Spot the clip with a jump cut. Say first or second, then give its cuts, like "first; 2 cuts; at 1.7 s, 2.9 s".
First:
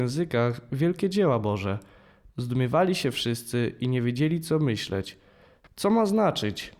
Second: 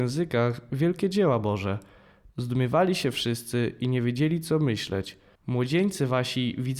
second; 1 cut; at 5.4 s